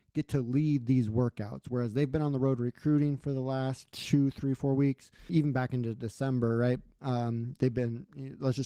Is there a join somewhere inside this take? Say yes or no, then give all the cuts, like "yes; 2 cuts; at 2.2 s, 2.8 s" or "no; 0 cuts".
yes; 1 cut; at 5.3 s